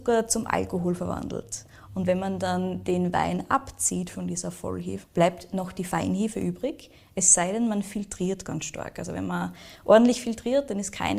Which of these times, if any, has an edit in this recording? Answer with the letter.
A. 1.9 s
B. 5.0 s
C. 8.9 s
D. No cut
B